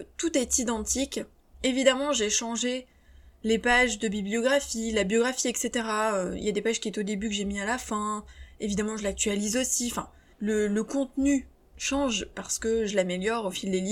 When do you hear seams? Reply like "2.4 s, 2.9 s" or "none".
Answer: none